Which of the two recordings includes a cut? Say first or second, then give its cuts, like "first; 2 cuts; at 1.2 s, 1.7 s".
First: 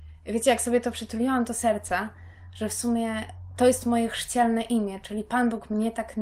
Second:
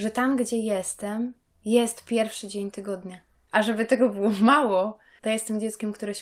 second; 1 cut; at 3.5 s